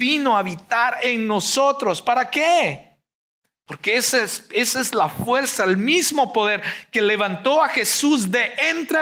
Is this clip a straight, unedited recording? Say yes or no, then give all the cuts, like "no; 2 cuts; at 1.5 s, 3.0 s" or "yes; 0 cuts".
yes; 0 cuts